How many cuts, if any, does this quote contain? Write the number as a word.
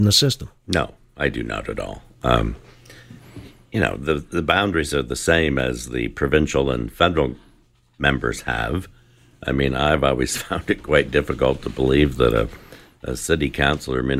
zero